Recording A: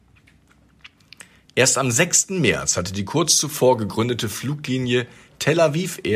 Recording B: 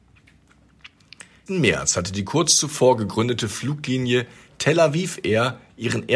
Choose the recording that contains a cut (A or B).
B